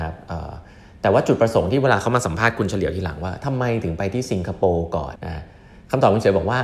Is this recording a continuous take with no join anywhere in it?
no; 1 cut; at 5.2 s

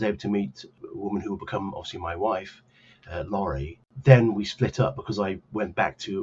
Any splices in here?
no; 0 cuts

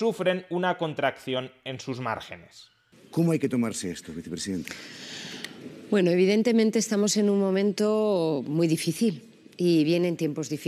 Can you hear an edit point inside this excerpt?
no; 0 cuts

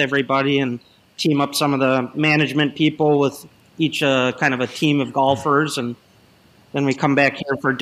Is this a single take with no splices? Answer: yes; 0 cuts

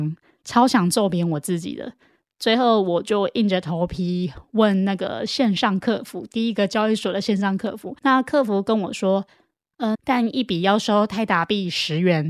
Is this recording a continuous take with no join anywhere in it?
no; 2 cuts; at 8.0 s, 9.9 s

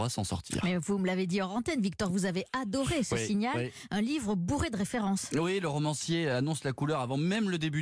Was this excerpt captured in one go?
yes; 0 cuts

